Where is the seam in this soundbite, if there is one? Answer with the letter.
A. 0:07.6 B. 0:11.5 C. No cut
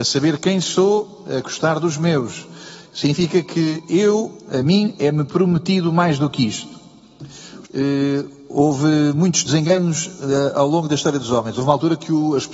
A